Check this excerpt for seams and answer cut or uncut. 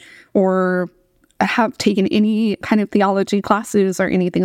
cut